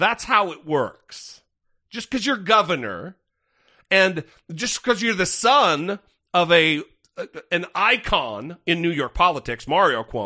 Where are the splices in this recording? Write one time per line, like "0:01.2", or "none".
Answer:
none